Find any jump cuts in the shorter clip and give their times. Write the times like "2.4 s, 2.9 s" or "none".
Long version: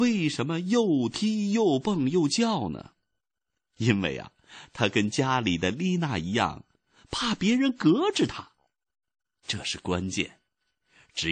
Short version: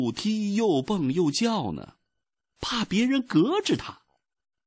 2.6 s